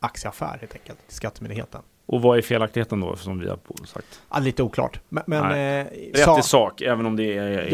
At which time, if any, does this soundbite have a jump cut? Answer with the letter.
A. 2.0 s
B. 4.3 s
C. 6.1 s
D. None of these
C